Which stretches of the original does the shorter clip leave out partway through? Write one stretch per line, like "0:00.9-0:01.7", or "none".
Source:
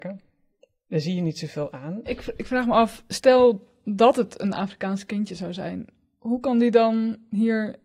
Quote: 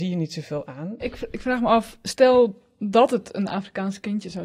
none

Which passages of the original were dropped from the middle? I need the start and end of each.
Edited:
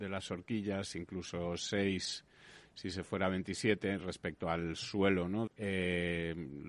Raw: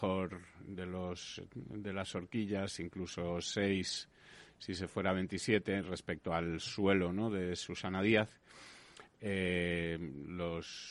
0:07.3-0:09.1

